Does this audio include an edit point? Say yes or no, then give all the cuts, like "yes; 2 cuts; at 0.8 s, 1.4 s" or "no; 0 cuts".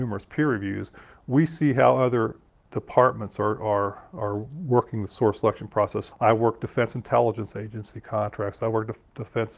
yes; 1 cut; at 6.1 s